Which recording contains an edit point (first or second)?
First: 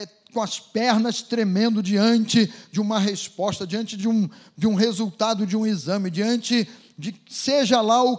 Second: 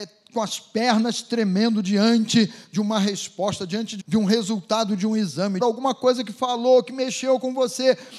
second